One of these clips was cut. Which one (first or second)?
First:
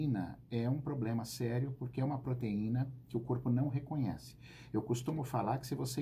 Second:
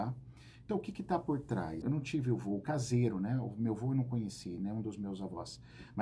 second